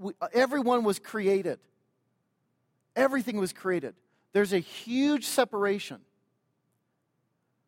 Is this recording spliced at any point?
no; 0 cuts

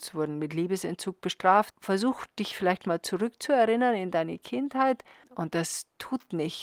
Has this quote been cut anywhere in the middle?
yes; 2 cuts; at 1.7 s, 5.2 s

